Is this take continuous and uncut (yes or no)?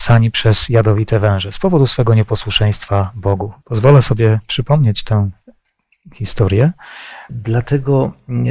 no